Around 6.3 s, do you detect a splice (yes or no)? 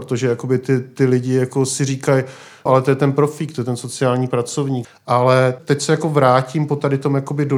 no